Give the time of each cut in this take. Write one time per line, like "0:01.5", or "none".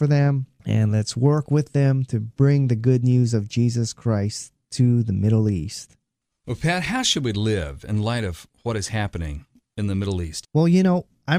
0:10.4